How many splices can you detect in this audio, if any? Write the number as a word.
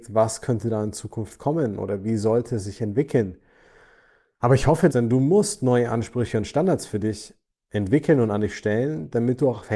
one